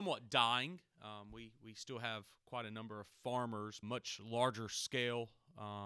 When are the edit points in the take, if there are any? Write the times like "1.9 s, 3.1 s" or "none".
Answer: 3.8 s